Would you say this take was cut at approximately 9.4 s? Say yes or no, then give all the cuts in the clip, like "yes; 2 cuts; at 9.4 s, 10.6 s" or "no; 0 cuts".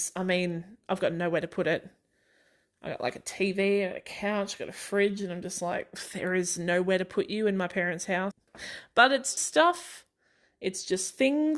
yes; 2 cuts; at 8.3 s, 9.4 s